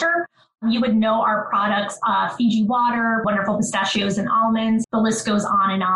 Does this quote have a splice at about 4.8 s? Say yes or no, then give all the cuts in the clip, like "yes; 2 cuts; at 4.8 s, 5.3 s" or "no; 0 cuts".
yes; 2 cuts; at 3.2 s, 4.8 s